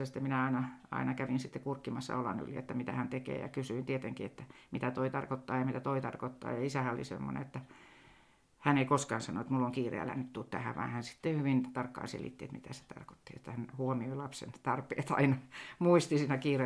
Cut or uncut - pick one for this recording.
uncut